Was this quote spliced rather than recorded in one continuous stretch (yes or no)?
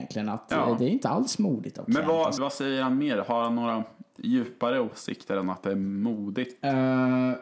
yes